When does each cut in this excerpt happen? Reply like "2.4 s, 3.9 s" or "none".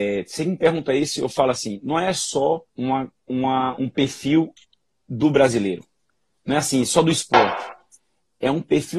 2.7 s